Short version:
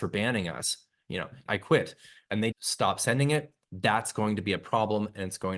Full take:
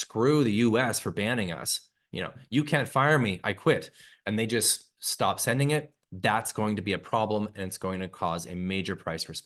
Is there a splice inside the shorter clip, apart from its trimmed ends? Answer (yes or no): yes